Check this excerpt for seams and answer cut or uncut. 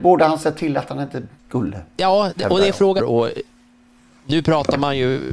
cut